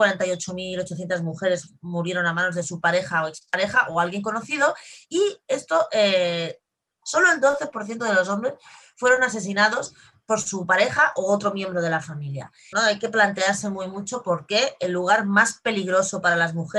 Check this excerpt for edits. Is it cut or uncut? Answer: cut